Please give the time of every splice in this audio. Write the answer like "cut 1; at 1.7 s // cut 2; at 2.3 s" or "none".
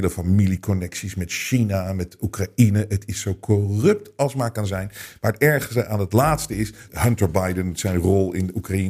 cut 1; at 6.9 s